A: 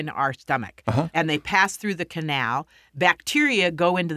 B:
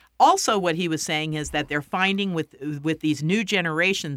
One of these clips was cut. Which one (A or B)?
A